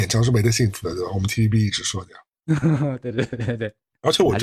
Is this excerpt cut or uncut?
uncut